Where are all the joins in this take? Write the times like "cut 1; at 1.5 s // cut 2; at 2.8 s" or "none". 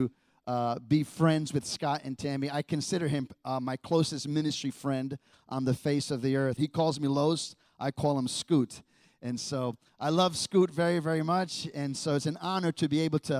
cut 1; at 6.6 s